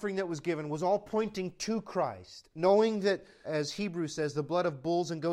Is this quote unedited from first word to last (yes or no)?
no